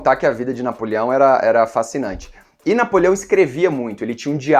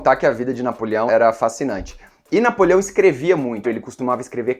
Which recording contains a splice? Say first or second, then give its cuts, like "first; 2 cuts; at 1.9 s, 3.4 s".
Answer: second; 2 cuts; at 1.1 s, 3.6 s